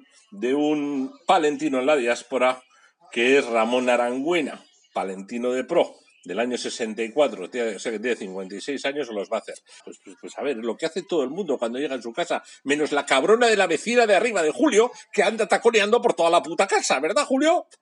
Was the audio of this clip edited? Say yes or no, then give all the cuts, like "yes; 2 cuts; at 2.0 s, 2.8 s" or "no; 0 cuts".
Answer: yes; 1 cut; at 9.8 s